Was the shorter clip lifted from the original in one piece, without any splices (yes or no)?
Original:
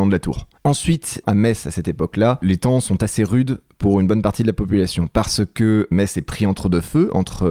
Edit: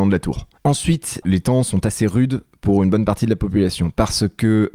no